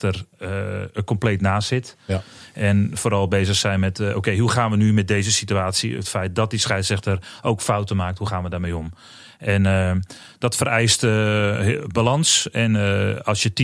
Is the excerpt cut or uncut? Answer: uncut